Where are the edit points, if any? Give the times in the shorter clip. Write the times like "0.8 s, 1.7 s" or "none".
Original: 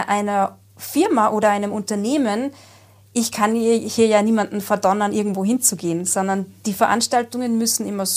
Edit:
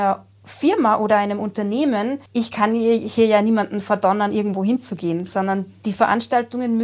2.3 s